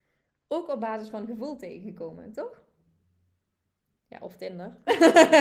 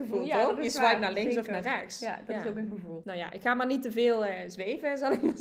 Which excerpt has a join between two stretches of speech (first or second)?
second